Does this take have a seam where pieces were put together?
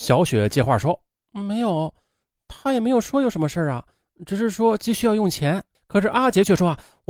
yes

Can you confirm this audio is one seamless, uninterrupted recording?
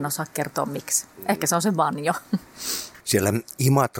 no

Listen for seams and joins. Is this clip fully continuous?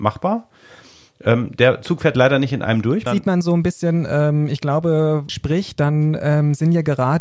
no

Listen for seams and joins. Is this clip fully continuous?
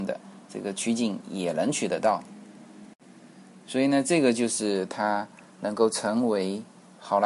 yes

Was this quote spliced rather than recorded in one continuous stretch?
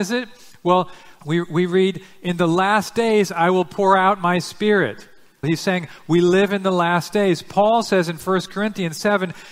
yes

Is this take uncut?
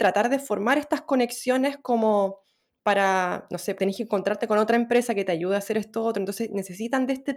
no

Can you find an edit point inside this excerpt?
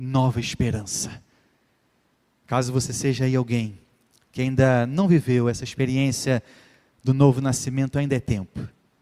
no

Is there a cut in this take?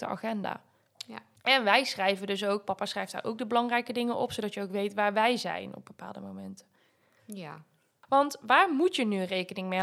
no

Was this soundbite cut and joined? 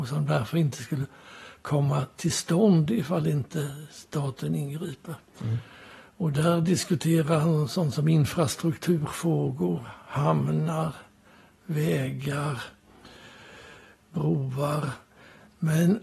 no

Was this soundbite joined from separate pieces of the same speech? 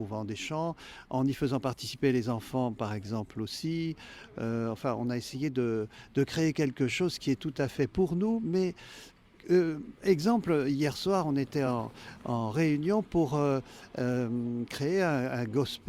no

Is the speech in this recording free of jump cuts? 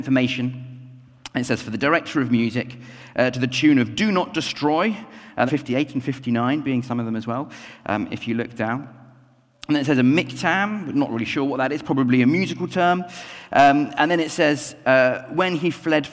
no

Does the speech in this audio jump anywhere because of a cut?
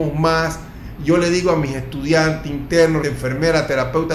yes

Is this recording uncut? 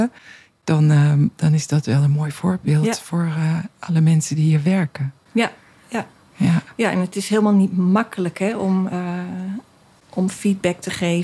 yes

